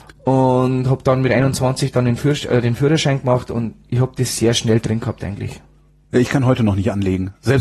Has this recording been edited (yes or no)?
no